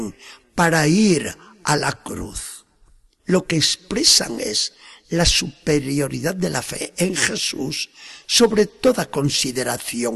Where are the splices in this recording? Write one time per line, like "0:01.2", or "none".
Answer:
0:03.2